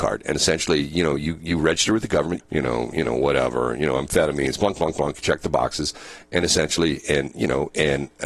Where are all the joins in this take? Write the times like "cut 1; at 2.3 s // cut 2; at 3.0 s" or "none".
cut 1; at 2.4 s